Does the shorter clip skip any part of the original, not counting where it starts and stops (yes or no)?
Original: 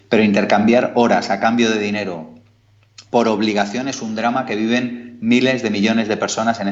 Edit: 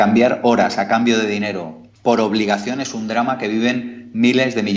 yes